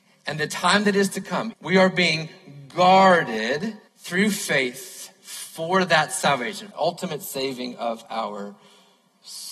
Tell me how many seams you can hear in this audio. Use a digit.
3